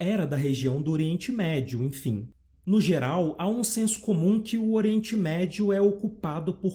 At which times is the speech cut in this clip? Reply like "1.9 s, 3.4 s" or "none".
2.5 s